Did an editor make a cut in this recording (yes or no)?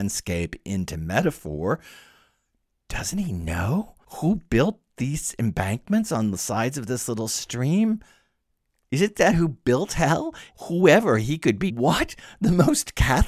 yes